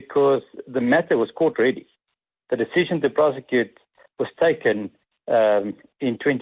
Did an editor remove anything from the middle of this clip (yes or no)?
no